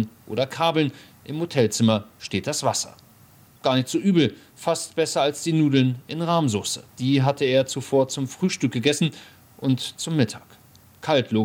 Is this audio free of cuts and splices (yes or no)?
no